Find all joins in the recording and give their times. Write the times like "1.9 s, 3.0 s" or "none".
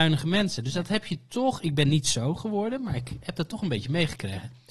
none